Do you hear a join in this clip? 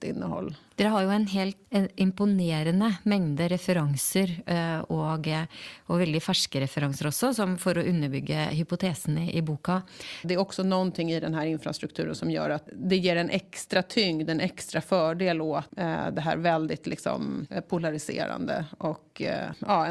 yes; 1 cut; at 10.2 s

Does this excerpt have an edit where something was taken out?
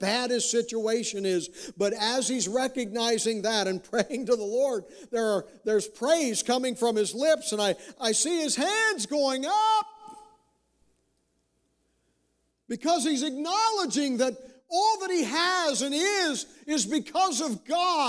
yes; 1 cut; at 7.9 s

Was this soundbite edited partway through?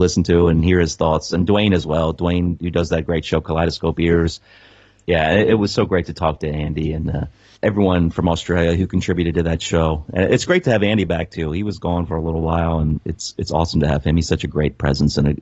yes; 2 cuts; at 5.0 s, 7.6 s

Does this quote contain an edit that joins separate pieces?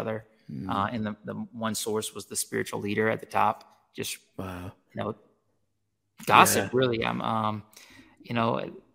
no; 0 cuts

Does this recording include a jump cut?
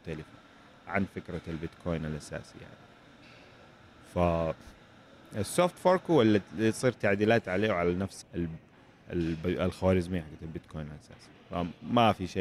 yes; 1 cut; at 8.2 s

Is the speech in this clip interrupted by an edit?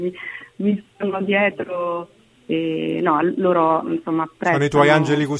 no; 0 cuts

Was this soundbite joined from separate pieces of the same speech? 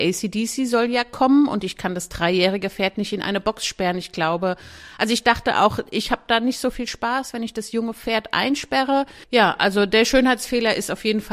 yes; 1 cut; at 9.2 s

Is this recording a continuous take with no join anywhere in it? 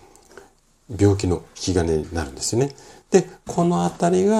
yes; 0 cuts

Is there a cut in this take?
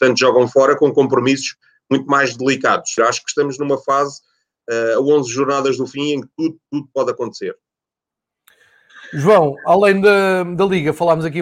yes; 1 cut; at 3.0 s

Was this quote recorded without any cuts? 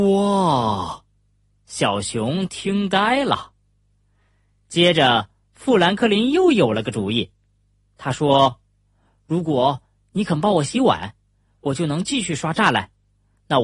yes; 0 cuts

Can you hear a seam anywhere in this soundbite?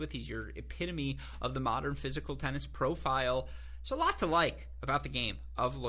no; 0 cuts

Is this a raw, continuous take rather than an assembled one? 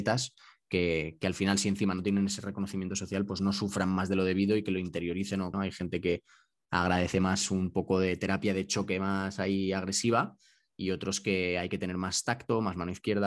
no; 1 cut; at 5.5 s

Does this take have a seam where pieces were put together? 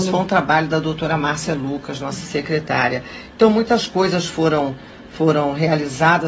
no; 0 cuts

